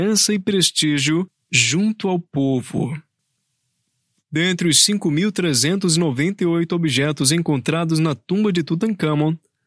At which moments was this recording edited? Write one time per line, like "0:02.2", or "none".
none